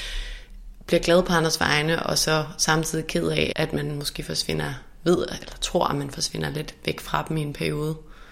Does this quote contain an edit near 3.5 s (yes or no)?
yes